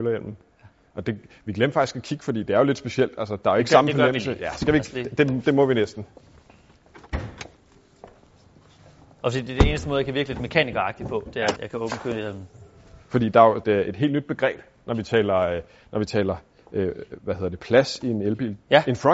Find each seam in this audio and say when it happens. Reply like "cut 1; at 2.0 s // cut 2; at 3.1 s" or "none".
cut 1; at 11.6 s // cut 2; at 13.6 s